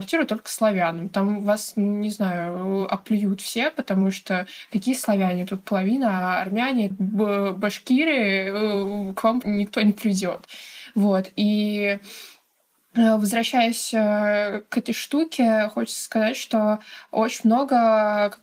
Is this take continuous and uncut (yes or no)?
no